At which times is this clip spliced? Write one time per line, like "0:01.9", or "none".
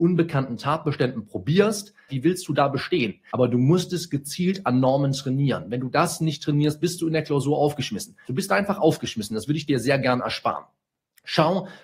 0:02.1
0:03.3
0:08.2